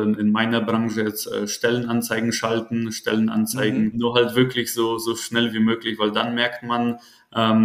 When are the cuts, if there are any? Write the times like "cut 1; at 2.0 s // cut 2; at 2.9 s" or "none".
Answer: cut 1; at 3.9 s